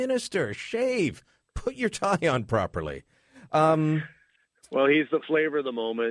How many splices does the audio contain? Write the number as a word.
zero